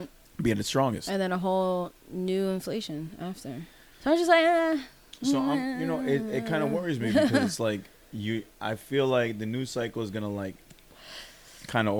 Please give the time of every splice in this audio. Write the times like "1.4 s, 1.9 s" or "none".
3.9 s